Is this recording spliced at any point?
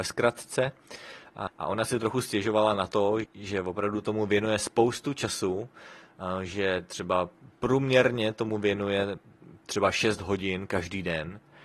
yes; 3 cuts; at 1.5 s, 3.2 s, 9.6 s

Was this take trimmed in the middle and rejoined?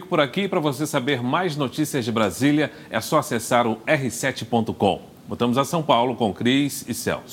no; 0 cuts

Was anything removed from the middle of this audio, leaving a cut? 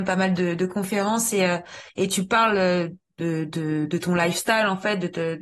no; 0 cuts

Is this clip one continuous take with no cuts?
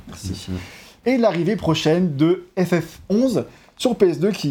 no; 1 cut; at 1.0 s

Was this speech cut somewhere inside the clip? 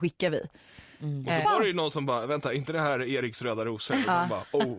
yes; 1 cut; at 1.4 s

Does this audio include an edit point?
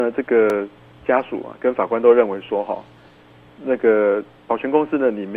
no; 0 cuts

